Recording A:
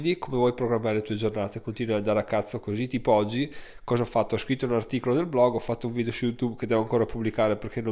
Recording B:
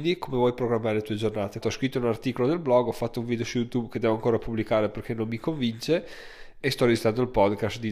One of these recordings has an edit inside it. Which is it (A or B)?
B